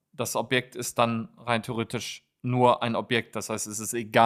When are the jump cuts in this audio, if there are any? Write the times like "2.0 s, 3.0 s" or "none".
none

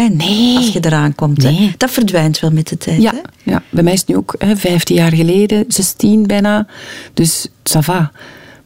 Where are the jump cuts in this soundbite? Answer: none

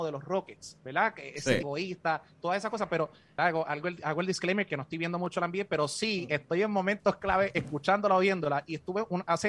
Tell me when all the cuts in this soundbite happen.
1.6 s, 3.4 s

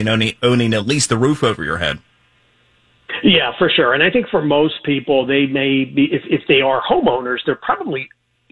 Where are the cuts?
none

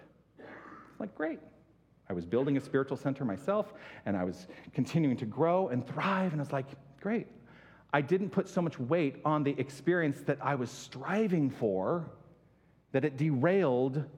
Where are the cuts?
none

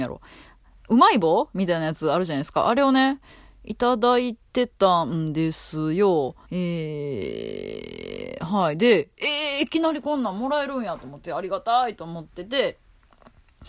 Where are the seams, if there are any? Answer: 6.4 s

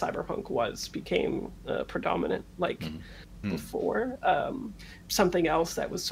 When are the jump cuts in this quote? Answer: 3.4 s, 5.0 s

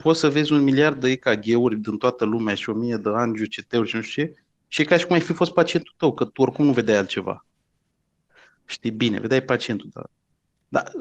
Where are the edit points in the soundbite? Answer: none

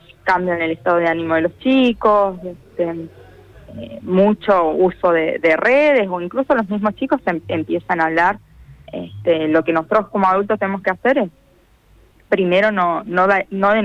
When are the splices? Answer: none

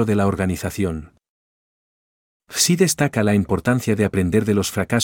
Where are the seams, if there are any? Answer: 2.4 s

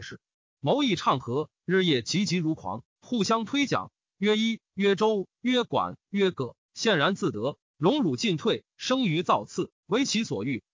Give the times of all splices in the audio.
7.6 s

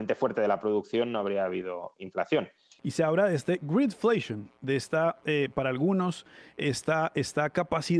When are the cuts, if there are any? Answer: 2.8 s

